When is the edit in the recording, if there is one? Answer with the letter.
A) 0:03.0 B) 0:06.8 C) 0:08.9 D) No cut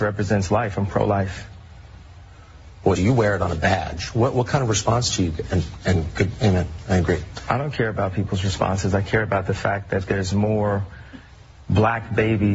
A